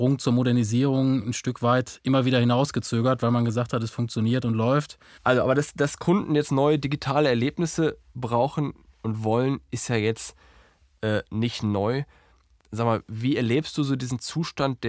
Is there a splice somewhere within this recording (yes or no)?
yes